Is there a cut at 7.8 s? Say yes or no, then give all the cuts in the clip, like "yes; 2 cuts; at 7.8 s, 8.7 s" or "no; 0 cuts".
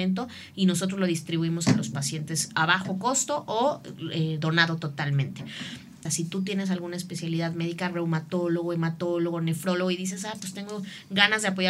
no; 1 cut; at 6.1 s